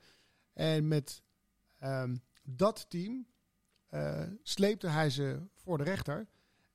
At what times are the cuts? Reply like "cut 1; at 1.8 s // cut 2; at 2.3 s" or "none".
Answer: none

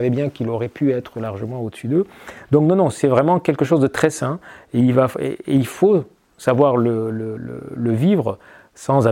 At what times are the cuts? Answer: none

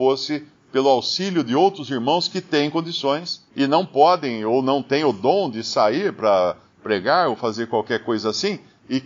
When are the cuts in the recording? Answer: cut 1; at 3.5 s

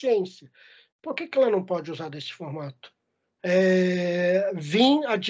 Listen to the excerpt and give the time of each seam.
cut 1; at 0.9 s // cut 2; at 3.4 s

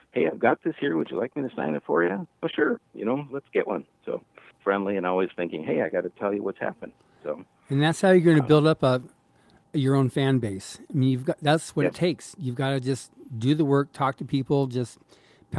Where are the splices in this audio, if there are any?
cut 1; at 4.5 s

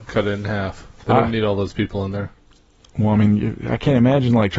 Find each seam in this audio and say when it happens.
cut 1; at 1.0 s

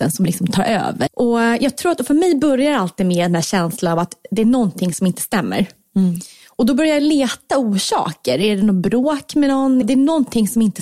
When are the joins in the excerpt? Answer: cut 1; at 1.1 s // cut 2; at 9.8 s

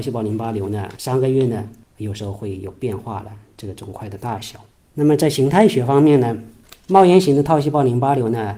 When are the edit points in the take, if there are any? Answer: none

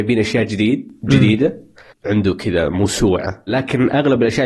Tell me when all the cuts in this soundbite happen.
cut 1; at 1.9 s

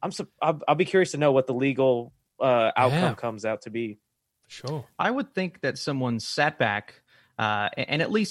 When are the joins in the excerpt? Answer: none

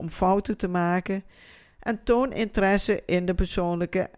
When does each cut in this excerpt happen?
none

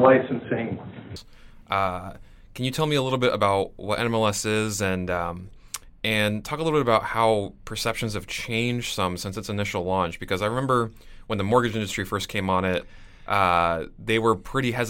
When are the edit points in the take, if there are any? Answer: none

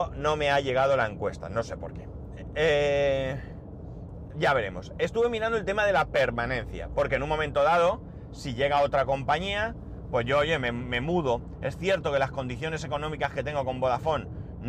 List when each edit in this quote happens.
none

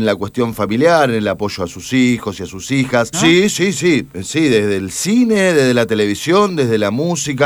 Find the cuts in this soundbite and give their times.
cut 1; at 3.1 s

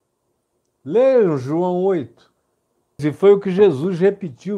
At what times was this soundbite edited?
cut 1; at 3.0 s

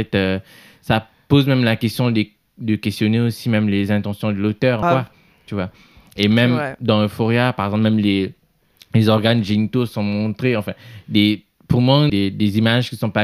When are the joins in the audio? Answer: cut 1; at 4.8 s // cut 2; at 12.1 s

